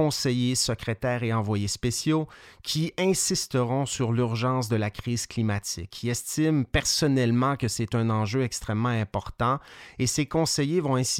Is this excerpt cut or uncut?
uncut